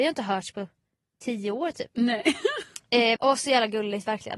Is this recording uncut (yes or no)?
no